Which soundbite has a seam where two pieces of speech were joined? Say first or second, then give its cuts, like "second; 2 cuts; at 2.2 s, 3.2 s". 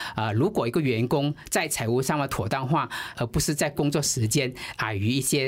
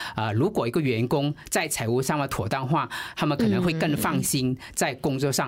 first; 1 cut; at 3.1 s